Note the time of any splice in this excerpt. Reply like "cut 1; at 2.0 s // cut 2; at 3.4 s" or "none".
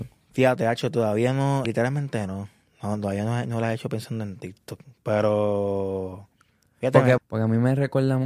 cut 1; at 1.6 s // cut 2; at 7.2 s